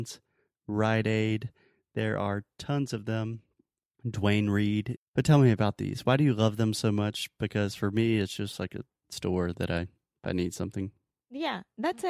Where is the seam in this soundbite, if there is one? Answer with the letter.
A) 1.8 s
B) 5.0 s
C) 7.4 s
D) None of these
B